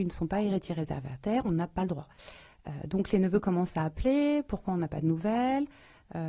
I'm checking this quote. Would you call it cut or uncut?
uncut